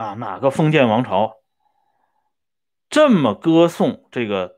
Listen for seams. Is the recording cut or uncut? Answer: uncut